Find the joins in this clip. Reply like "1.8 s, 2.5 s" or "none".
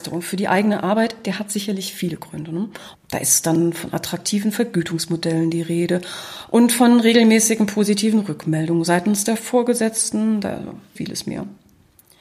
2.9 s, 11.0 s